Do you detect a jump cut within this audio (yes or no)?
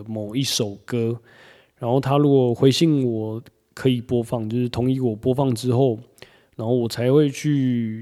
no